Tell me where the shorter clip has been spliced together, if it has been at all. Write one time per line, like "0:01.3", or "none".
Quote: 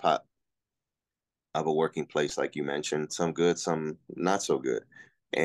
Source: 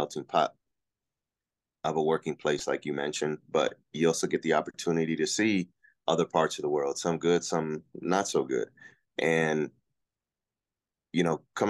0:03.1